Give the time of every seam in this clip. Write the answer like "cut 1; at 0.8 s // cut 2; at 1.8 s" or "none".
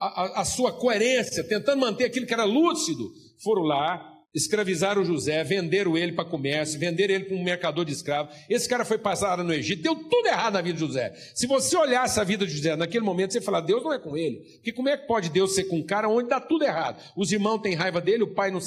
cut 1; at 4.2 s